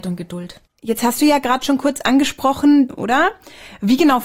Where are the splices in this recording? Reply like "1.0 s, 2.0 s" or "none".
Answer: 2.9 s